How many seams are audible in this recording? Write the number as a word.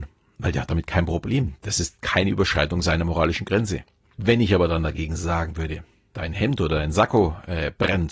one